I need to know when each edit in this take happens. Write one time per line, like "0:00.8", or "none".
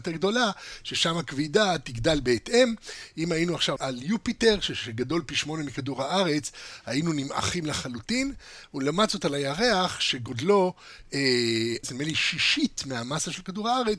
0:03.8
0:11.8